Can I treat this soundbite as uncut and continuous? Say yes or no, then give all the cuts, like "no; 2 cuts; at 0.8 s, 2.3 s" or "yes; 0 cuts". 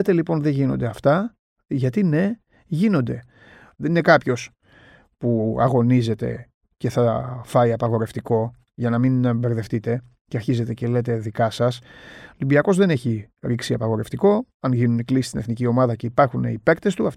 no; 1 cut; at 3.7 s